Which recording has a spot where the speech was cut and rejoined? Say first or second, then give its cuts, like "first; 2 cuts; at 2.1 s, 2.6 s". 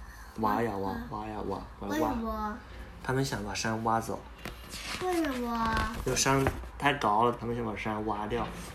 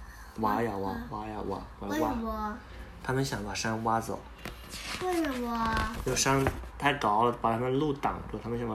first; 1 cut; at 7.4 s